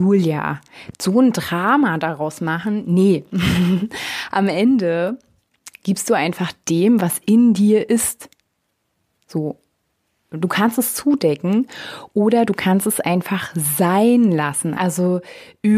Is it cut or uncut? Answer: cut